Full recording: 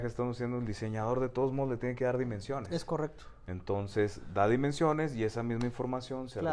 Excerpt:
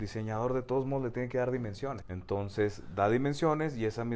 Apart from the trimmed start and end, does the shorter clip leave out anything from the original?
yes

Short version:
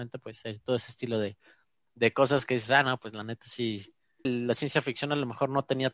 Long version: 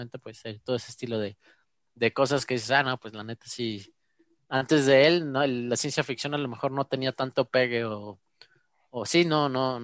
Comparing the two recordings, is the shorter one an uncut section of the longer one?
no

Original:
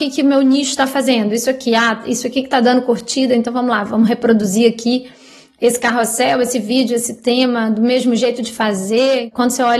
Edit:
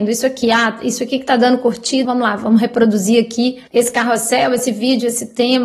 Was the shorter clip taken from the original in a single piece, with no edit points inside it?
no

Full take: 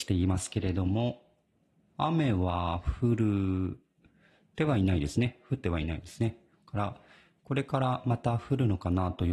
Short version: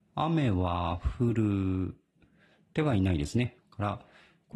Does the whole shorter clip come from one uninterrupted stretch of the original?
no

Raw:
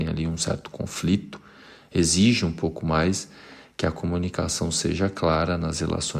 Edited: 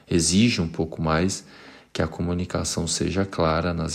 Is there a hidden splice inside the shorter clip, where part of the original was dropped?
no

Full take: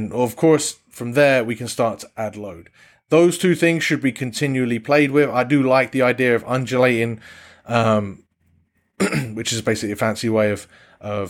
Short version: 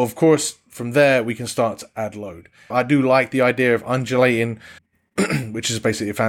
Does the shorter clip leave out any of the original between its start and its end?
yes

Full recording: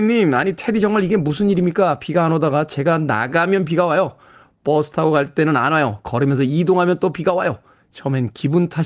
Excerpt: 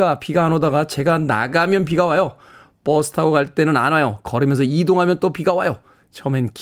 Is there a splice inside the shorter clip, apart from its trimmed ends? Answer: no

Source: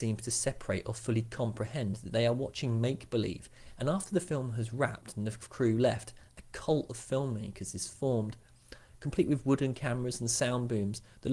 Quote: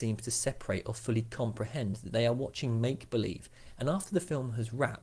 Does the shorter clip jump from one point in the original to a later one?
no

